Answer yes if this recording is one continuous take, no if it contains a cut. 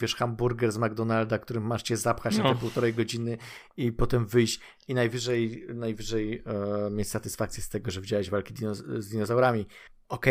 yes